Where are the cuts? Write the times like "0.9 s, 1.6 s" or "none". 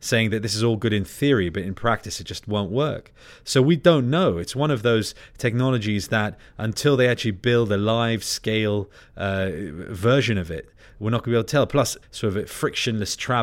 12.0 s